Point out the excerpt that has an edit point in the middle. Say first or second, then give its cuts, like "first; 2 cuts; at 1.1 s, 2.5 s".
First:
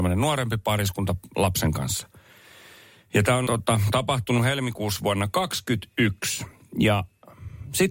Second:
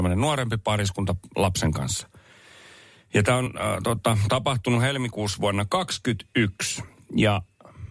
first; 1 cut; at 3.5 s